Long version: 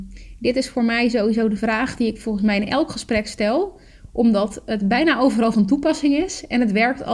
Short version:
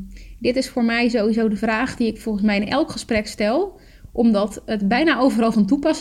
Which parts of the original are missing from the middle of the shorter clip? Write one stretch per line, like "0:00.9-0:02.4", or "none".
none